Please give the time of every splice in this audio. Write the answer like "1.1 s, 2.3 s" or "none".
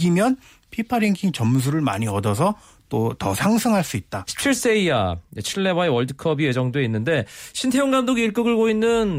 4.3 s